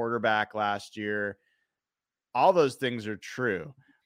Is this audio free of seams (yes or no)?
yes